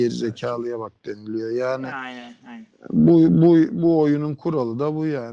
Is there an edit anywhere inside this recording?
no; 0 cuts

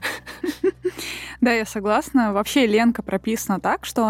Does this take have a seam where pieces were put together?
no; 0 cuts

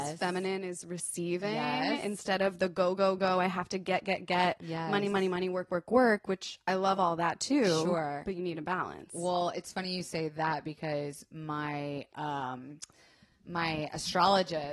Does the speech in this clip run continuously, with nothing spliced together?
yes; 0 cuts

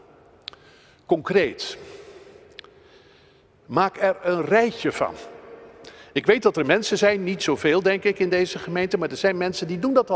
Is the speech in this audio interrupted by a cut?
no; 0 cuts

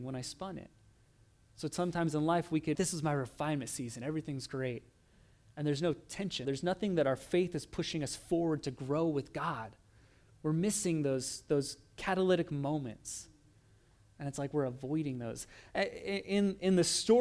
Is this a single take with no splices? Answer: no; 2 cuts; at 2.7 s, 6.4 s

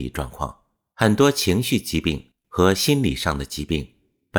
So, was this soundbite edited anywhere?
yes; 1 cut; at 0.9 s

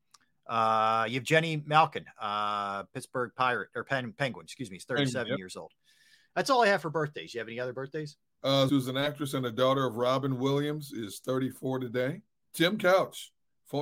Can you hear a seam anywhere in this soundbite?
yes; 2 cuts; at 8.7 s, 12.4 s

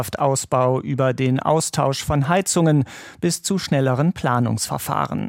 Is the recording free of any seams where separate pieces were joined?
yes; 0 cuts

